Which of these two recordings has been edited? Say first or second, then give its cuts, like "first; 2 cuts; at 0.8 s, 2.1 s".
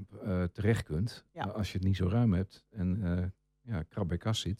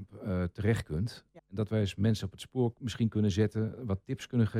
second; 1 cut; at 1.4 s